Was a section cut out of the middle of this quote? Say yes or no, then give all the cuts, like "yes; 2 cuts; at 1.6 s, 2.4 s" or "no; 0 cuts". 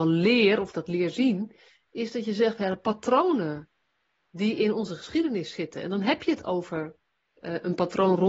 no; 0 cuts